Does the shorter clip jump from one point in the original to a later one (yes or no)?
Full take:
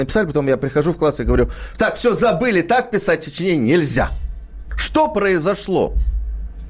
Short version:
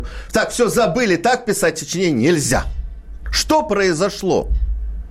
no